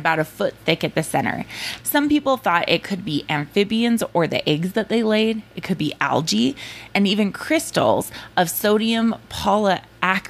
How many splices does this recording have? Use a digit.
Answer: 2